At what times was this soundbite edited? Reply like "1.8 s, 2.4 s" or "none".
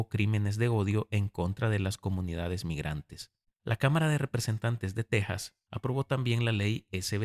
3.5 s, 5.7 s